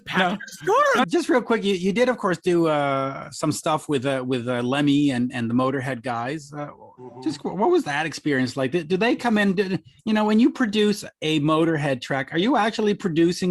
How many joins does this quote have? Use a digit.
1